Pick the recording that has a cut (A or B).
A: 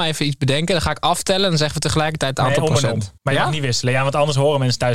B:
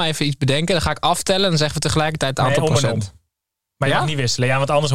A